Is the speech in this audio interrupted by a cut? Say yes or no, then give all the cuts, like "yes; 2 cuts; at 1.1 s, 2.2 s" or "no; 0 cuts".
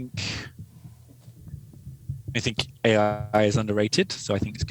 no; 0 cuts